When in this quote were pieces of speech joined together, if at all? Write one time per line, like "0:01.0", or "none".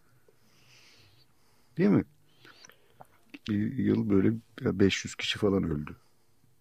0:03.5